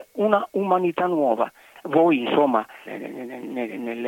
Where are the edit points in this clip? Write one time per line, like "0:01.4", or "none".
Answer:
0:01.7
0:02.9